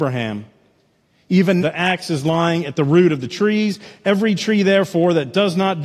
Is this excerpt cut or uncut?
cut